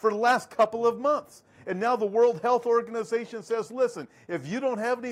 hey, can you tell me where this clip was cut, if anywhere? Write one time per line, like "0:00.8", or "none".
none